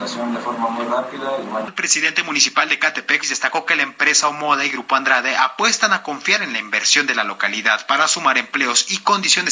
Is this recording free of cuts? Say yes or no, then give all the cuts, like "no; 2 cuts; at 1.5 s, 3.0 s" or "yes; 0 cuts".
no; 2 cuts; at 1.7 s, 3.2 s